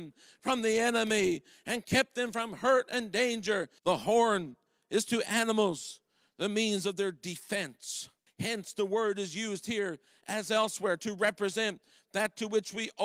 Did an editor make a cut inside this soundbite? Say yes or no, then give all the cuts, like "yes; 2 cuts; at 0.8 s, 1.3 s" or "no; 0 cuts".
yes; 2 cuts; at 3.8 s, 8.3 s